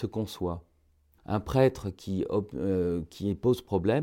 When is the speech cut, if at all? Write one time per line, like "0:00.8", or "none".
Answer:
0:01.2

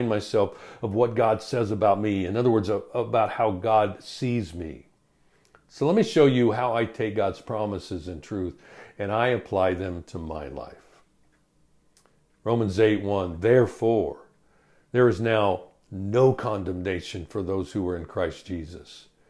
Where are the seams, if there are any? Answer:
none

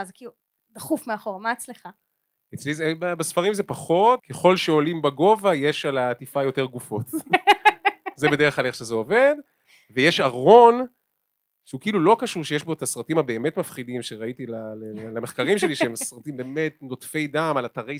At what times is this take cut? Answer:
0:04.2

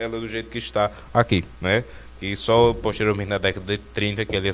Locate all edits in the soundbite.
0:01.5

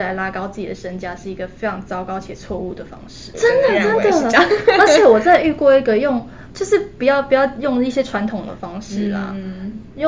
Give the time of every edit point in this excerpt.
0:03.3
0:06.5

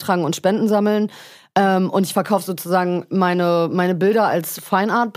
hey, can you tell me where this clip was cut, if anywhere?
none

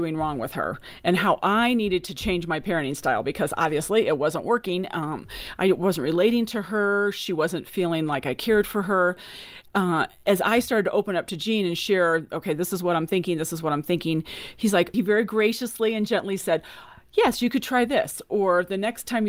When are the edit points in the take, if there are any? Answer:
0:14.9

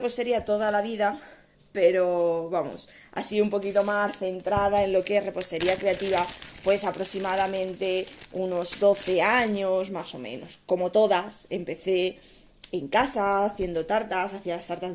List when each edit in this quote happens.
none

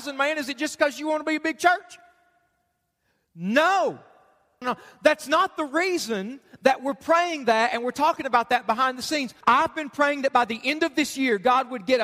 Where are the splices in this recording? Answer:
0:04.6
0:09.4

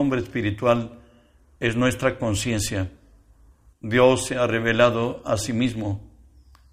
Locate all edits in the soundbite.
0:03.7

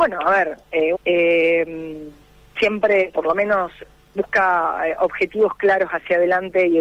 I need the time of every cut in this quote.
0:00.9

